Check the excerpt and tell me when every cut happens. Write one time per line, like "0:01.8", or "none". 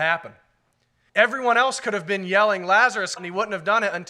0:01.1
0:03.2

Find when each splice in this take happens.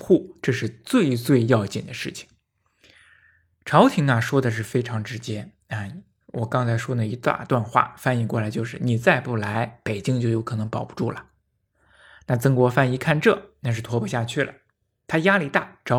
none

